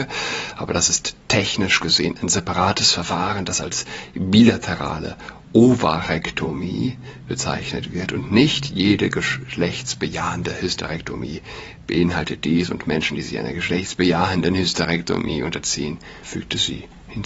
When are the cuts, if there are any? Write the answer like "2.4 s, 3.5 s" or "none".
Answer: 16.2 s